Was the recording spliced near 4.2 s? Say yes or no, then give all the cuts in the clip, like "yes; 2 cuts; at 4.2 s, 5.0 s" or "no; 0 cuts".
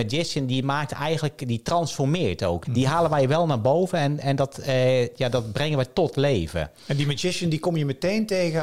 no; 1 cut; at 2.6 s